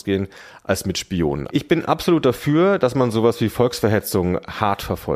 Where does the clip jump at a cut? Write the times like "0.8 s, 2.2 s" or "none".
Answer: 1.5 s